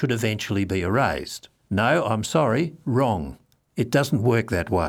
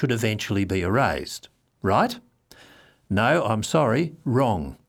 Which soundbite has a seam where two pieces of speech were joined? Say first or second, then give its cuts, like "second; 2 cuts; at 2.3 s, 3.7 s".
first; 1 cut; at 1.6 s